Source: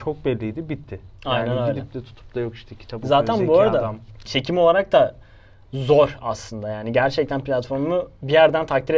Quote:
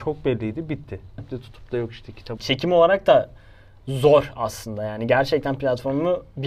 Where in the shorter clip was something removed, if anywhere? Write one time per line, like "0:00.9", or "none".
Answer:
0:01.2
0:02.4

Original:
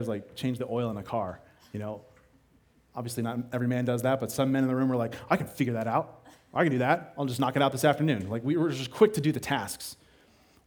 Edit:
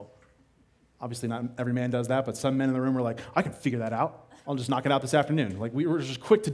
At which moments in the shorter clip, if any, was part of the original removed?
0:04.4

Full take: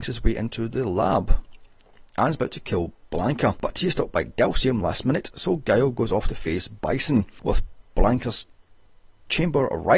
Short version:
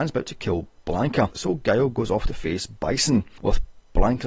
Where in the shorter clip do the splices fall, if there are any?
0:01.3

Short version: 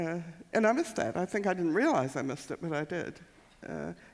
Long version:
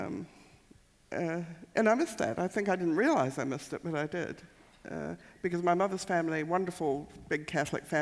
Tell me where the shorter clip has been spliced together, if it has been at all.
none

